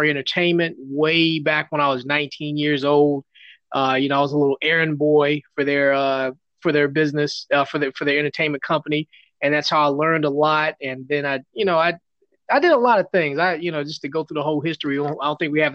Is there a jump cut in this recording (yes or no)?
no